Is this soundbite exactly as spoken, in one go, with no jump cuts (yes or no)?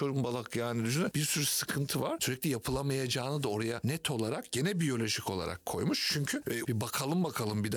no